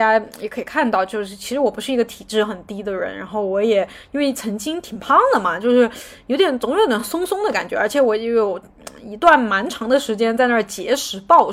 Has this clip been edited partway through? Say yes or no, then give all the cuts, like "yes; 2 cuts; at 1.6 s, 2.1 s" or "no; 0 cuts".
no; 0 cuts